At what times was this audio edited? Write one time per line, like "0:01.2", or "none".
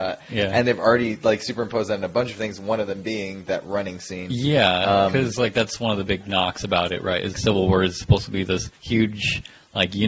0:07.3
0:08.8